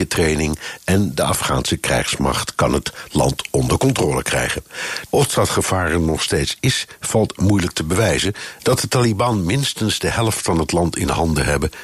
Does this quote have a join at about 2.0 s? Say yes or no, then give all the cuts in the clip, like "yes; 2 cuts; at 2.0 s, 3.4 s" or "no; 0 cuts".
no; 2 cuts; at 5.1 s, 8.6 s